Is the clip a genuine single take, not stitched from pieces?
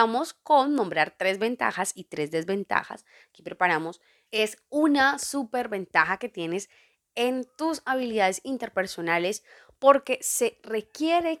no; 1 cut; at 4.3 s

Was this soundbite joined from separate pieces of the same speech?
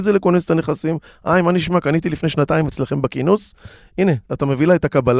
no; 0 cuts

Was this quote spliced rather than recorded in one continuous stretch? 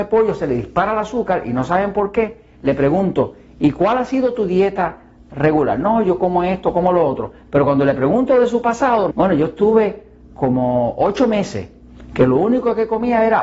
yes; 1 cut; at 9.1 s

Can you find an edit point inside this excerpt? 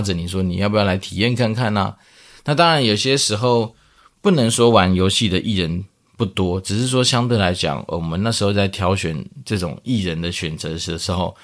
no; 0 cuts

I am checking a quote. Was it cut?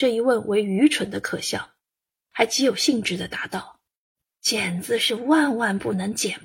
yes; 2 cuts; at 2.3 s, 3.9 s

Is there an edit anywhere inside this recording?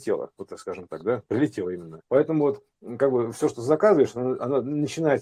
yes; 1 cut; at 2.0 s

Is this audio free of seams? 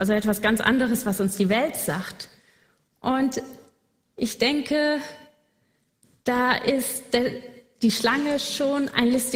yes; 0 cuts

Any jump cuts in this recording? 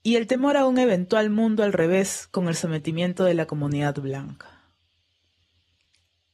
no; 0 cuts

